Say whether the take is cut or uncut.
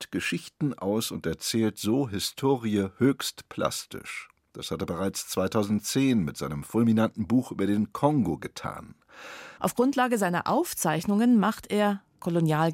cut